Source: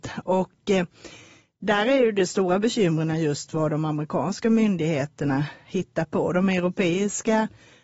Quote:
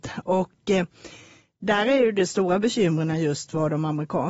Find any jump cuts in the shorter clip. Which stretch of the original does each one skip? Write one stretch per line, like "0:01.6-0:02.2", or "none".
none